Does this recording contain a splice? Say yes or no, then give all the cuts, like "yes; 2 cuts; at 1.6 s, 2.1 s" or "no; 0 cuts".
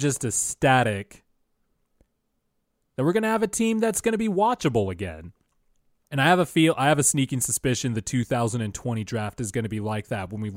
yes; 1 cut; at 6.0 s